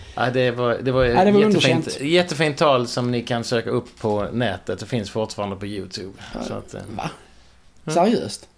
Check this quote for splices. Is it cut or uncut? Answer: uncut